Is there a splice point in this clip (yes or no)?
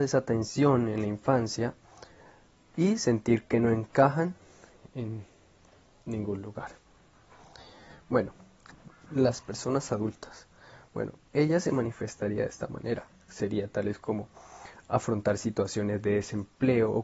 no